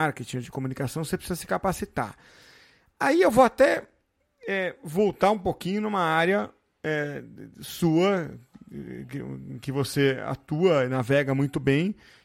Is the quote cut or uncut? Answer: uncut